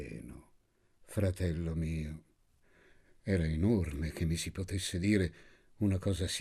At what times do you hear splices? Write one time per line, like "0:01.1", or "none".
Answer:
none

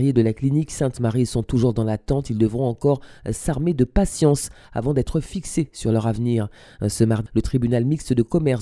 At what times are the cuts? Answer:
0:07.3

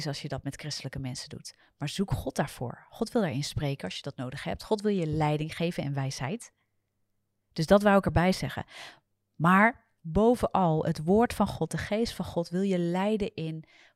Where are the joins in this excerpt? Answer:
0:10.0

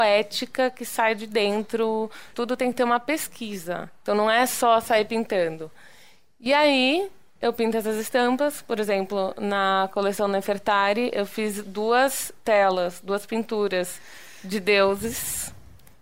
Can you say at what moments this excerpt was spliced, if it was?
0:02.3

